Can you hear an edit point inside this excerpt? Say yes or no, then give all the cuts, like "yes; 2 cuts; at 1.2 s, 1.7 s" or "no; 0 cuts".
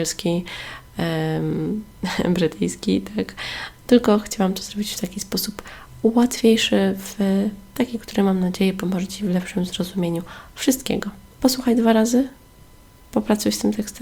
yes; 1 cut; at 11.4 s